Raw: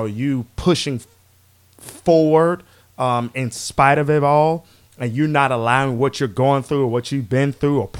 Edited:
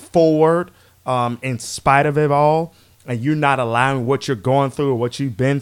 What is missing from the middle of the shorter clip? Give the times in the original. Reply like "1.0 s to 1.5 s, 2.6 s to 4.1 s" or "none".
none